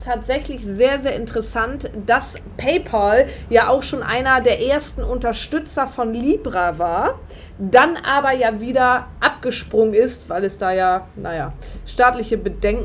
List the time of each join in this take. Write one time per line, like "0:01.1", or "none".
none